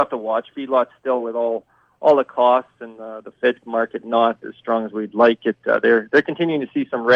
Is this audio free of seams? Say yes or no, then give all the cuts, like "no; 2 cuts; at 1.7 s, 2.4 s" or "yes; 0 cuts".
yes; 0 cuts